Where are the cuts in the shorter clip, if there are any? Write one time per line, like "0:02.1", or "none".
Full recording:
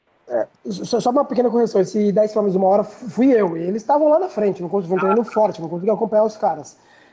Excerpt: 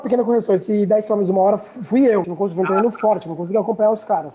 0:02.2